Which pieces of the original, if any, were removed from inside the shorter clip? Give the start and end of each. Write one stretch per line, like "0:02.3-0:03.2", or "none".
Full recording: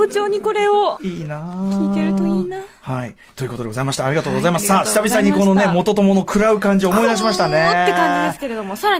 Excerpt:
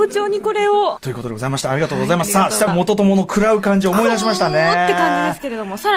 0:01.0-0:03.3
0:05.0-0:05.7